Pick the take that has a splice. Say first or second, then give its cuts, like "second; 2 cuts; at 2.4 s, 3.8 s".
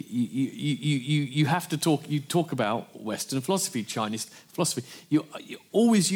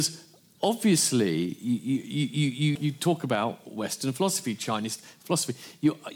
second; 1 cut; at 2.8 s